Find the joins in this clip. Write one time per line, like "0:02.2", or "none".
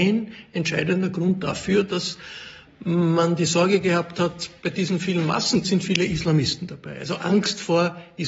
0:05.6